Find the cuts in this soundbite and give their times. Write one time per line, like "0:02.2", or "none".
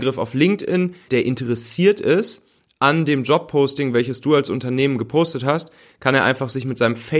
0:01.1